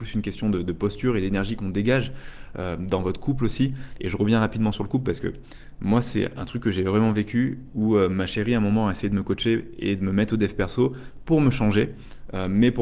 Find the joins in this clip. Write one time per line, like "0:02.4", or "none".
none

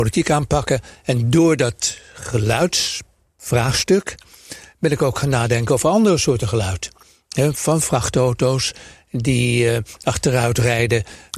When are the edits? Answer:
none

